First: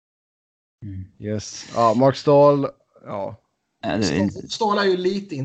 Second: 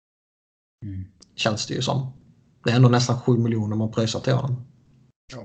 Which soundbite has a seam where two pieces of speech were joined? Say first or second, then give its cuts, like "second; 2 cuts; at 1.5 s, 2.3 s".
first; 1 cut; at 1.1 s